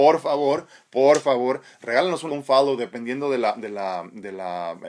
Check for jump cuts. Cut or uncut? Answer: cut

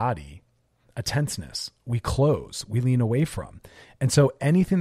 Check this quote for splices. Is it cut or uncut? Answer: uncut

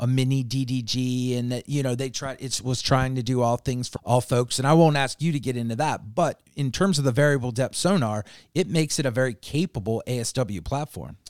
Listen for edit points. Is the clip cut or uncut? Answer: cut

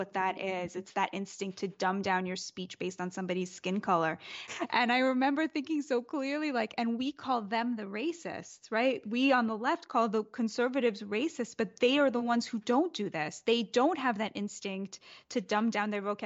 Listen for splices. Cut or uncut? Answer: cut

